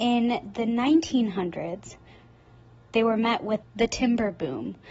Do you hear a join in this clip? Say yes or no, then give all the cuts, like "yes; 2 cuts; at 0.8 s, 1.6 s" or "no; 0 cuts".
yes; 1 cut; at 3.6 s